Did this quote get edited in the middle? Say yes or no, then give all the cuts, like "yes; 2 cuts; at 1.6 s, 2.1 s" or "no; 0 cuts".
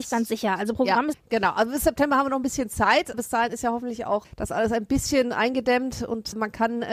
yes; 1 cut; at 1.1 s